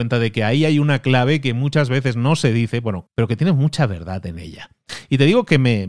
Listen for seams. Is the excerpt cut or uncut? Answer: cut